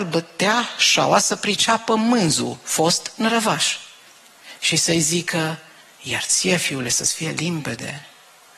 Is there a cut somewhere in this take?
no; 0 cuts

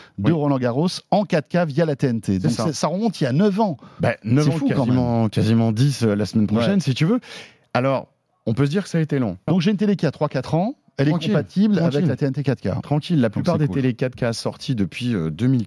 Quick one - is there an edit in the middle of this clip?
yes; 1 cut; at 9.5 s

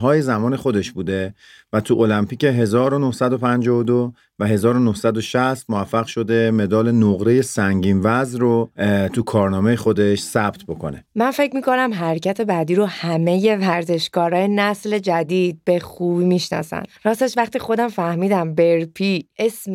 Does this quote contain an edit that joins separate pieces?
no; 0 cuts

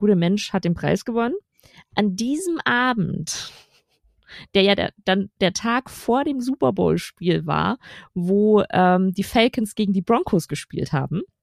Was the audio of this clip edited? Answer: no; 0 cuts

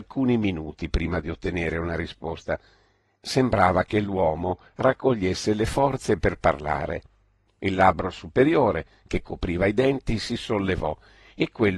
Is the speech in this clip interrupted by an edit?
yes; 1 cut; at 7.5 s

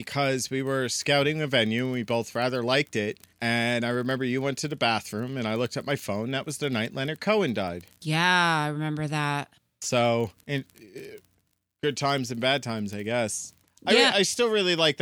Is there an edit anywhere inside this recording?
yes; 1 cut; at 10.4 s

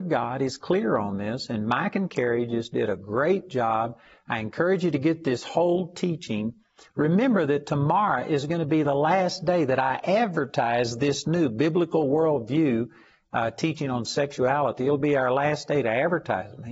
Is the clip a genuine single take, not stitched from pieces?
yes; 0 cuts

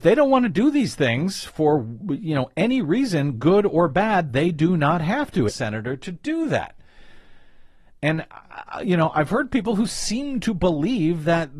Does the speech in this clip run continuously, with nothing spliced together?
no; 1 cut; at 5.5 s

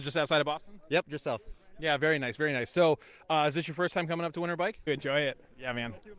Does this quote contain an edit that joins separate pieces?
yes; 1 cut; at 4.9 s

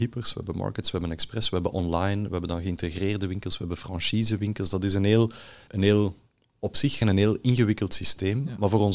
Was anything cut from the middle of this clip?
yes; 2 cuts; at 5.7 s, 7.0 s

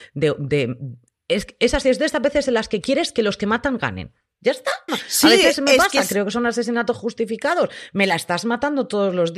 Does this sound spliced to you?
yes; 1 cut; at 4.9 s

